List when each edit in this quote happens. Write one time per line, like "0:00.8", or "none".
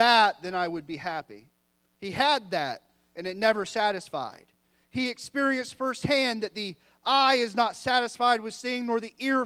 0:01.9